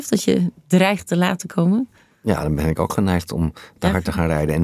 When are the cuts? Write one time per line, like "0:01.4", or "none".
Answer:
none